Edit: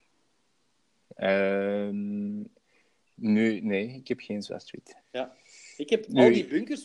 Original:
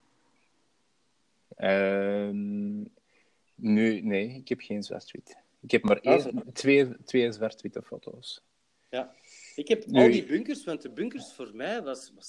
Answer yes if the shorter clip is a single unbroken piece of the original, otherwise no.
no